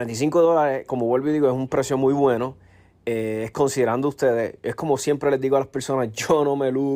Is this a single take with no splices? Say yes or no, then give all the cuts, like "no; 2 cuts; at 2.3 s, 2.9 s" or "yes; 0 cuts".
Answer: yes; 0 cuts